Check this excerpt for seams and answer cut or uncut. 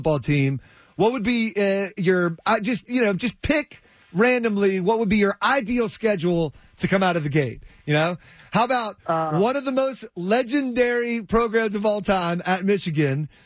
uncut